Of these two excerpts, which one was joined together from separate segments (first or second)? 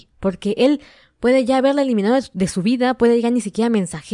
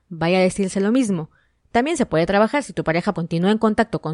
second